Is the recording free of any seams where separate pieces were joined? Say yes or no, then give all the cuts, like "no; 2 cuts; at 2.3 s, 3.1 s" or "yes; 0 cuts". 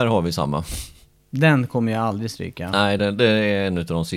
yes; 0 cuts